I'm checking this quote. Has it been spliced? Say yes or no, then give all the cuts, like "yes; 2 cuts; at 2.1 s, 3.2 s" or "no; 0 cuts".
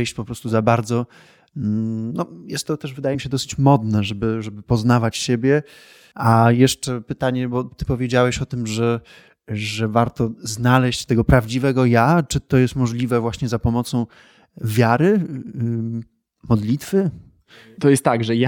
no; 0 cuts